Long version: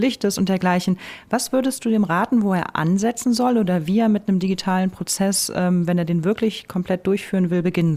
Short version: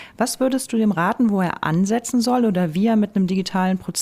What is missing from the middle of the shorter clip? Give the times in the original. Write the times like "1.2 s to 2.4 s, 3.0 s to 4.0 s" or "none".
none